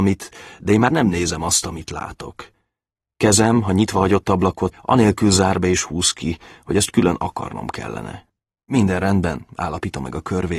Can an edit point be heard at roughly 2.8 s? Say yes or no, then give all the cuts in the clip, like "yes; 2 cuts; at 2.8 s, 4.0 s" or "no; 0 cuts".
no; 2 cuts; at 4.7 s, 9.5 s